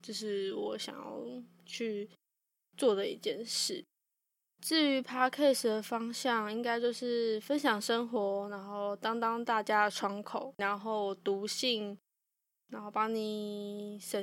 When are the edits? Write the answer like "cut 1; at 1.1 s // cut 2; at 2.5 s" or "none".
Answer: cut 1; at 10.6 s